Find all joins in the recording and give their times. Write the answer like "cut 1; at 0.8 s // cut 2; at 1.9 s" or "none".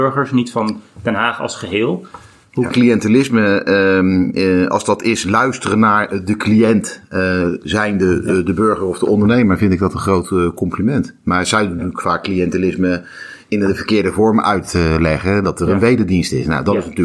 cut 1; at 2.7 s